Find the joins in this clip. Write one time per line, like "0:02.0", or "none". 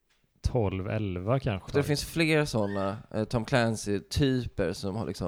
0:01.7